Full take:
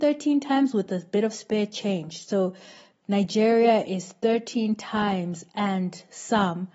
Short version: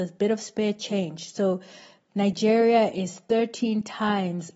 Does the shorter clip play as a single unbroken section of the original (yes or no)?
yes